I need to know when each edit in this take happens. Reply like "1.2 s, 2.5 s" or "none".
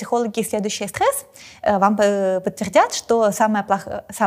none